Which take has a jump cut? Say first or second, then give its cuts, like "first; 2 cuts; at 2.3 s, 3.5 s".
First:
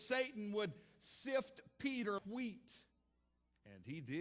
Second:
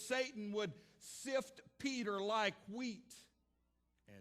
first; 1 cut; at 2.2 s